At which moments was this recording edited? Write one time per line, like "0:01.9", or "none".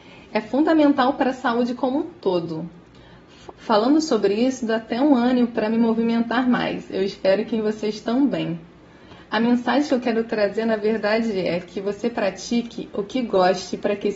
0:03.5